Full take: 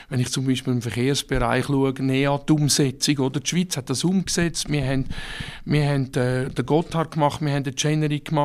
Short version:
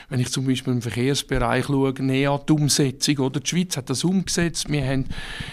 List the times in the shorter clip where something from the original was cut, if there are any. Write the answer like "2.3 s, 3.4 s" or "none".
none